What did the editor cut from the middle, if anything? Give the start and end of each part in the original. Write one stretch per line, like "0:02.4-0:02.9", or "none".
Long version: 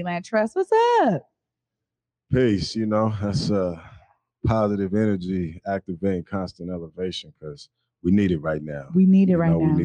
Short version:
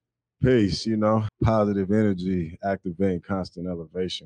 0:03.2-0:04.3